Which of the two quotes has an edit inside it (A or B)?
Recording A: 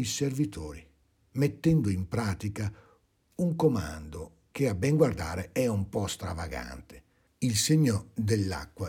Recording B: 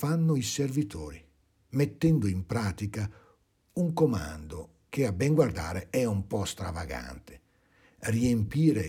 A